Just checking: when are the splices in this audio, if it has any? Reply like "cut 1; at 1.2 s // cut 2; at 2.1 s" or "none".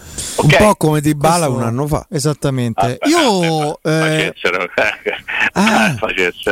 none